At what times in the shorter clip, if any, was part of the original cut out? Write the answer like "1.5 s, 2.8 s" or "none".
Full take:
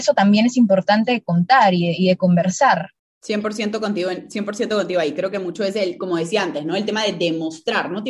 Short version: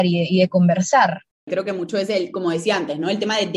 1.5 s

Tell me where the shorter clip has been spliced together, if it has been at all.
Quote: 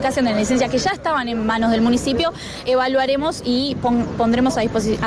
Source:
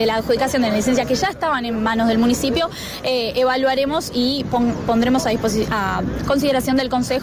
2.6 s

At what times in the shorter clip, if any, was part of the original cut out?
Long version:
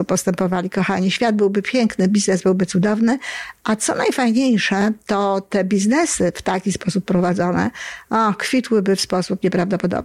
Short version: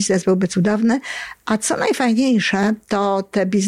none

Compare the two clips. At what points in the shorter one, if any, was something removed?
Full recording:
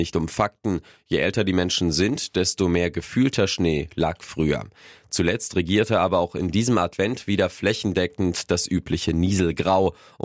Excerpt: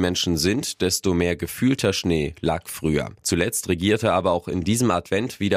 3.2 s

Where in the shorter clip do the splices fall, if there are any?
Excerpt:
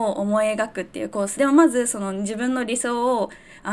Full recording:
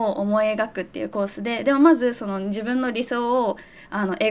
1.4 s

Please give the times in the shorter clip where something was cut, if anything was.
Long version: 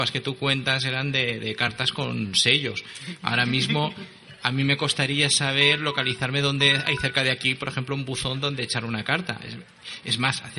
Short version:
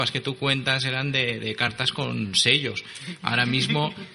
none

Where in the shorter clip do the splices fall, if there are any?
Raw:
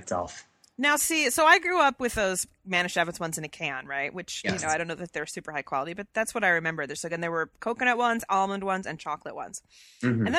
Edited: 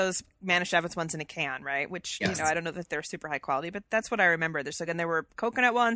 none

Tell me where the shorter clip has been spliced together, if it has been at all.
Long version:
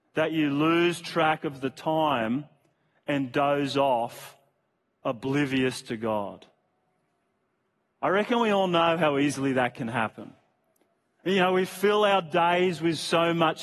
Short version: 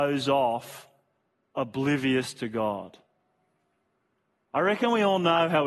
none

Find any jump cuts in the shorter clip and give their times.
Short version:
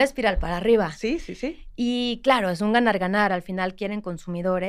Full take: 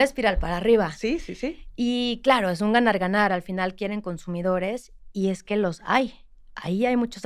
none

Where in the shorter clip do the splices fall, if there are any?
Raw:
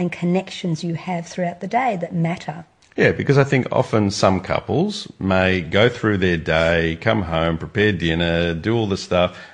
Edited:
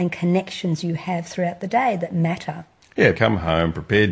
3.1 s

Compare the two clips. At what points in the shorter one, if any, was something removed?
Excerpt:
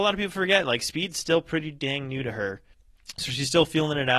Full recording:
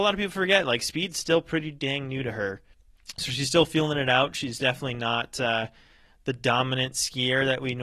none

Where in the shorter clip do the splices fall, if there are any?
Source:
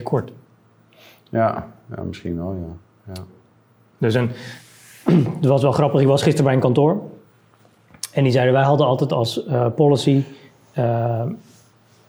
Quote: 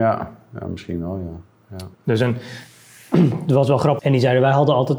1.9 s, 4.0 s

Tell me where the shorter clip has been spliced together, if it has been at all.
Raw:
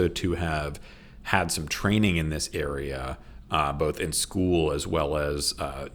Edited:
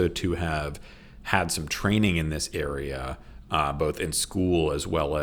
none

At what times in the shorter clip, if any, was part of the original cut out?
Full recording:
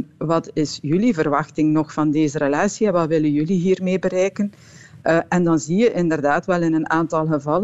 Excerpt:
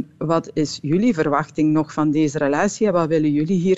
none

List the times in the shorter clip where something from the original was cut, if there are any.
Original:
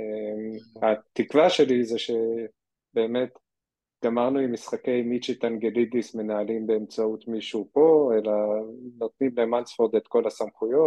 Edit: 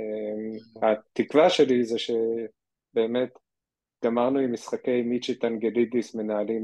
none

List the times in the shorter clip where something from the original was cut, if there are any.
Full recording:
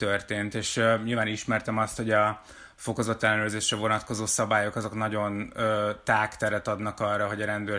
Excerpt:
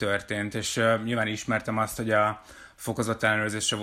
none

